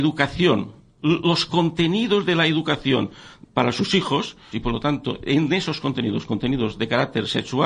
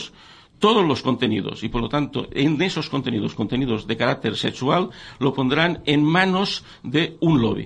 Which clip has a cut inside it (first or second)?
first